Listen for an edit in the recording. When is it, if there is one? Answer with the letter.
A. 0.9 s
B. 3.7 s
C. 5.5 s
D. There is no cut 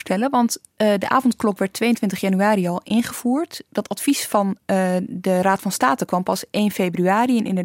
D